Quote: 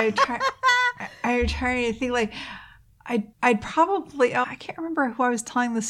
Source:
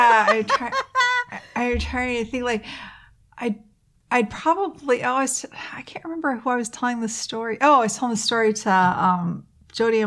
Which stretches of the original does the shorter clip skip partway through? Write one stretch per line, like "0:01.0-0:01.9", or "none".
0:03.6-0:04.0
0:05.1-0:05.7